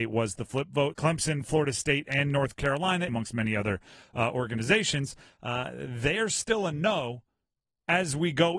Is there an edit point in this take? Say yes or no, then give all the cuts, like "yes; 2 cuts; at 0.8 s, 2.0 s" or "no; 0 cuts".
yes; 2 cuts; at 0.9 s, 3.1 s